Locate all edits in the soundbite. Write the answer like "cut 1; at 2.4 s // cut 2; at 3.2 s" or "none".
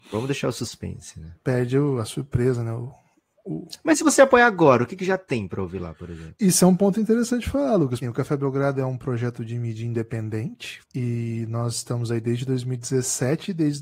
cut 1; at 8.0 s // cut 2; at 10.8 s